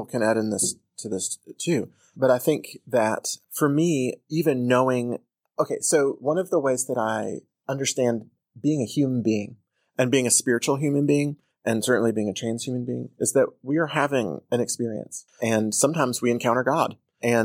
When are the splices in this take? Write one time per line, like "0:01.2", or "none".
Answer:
0:15.3